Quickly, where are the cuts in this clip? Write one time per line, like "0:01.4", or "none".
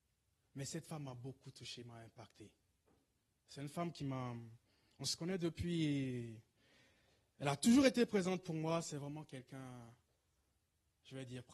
none